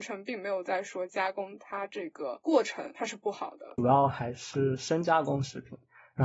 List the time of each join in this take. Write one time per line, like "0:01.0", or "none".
0:03.8